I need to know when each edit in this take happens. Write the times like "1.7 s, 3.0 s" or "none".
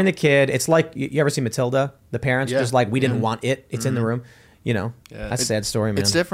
5.0 s